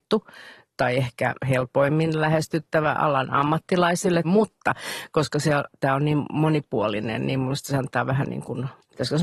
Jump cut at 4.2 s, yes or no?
yes